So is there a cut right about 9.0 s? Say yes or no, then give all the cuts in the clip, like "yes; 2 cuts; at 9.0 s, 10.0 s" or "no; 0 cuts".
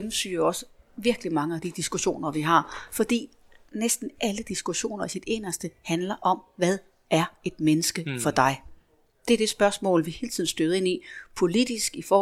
no; 0 cuts